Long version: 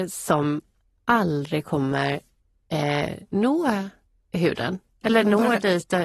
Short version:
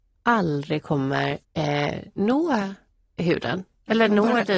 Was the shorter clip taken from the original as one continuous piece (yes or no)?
no